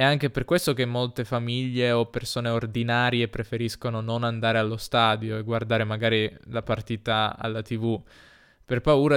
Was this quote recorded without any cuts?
yes; 0 cuts

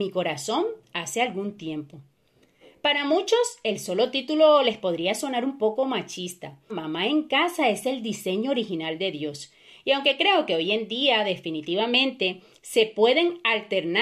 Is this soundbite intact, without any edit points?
no; 1 cut; at 6.7 s

